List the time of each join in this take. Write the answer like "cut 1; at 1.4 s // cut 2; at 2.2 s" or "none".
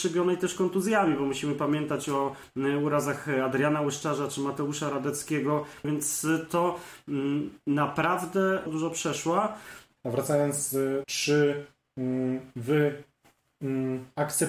cut 1; at 8.7 s // cut 2; at 10.0 s // cut 3; at 11.0 s